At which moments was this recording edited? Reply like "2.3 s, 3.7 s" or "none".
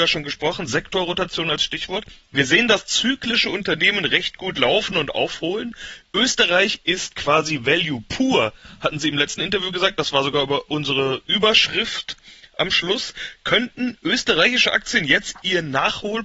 none

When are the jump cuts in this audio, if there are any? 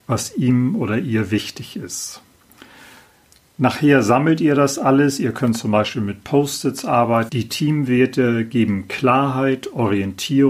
7.3 s

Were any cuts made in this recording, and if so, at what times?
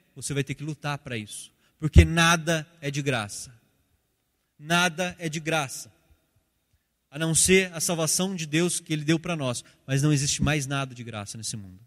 none

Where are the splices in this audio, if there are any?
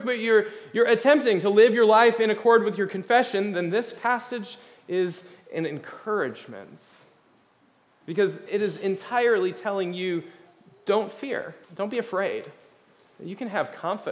8.5 s, 11.6 s

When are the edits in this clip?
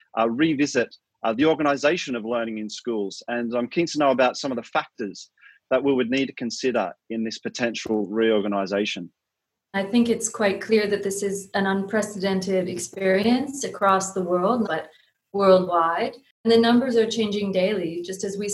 9.7 s, 14.6 s

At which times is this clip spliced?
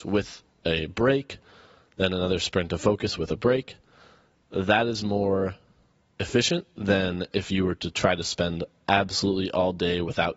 none

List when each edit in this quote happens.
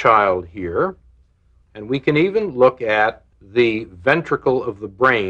1.6 s, 3.3 s

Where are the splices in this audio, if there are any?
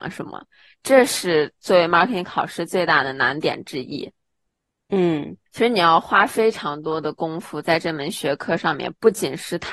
5.5 s

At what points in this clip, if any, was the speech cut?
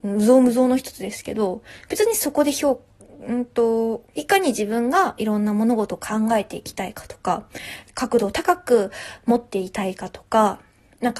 4.1 s, 7.9 s

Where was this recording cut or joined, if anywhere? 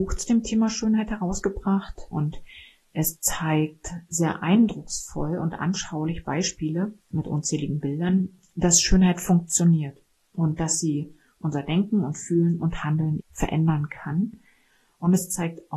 2.1 s, 7.0 s, 13.2 s

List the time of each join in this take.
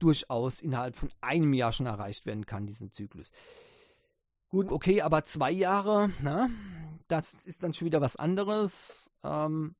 4.7 s

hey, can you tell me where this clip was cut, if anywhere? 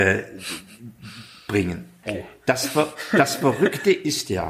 2.0 s

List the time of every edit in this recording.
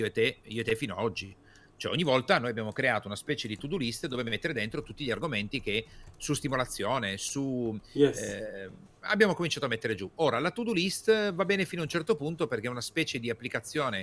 none

